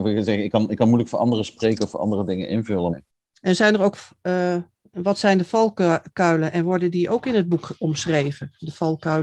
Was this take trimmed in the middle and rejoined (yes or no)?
yes